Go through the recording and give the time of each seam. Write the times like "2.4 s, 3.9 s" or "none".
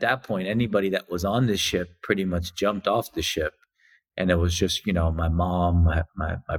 none